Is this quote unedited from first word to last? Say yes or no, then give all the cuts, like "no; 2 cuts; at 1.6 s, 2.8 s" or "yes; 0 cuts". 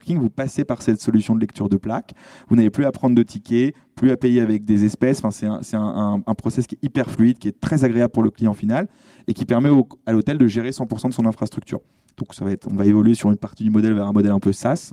no; 1 cut; at 12.1 s